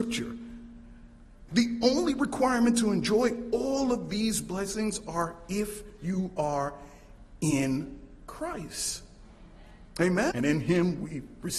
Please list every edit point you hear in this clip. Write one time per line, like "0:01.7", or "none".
0:01.5
0:10.3